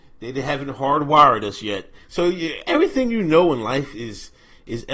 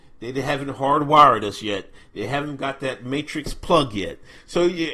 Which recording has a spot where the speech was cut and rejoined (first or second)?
first